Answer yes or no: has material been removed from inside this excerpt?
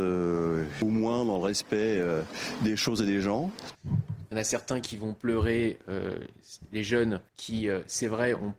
yes